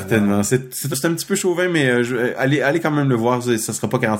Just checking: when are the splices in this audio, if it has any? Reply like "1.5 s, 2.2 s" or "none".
0.9 s